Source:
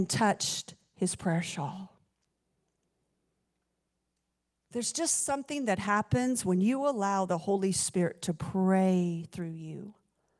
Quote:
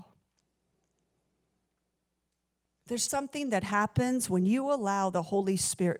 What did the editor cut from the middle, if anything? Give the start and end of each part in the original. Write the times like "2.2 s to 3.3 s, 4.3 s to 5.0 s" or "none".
4.9 s to 5.2 s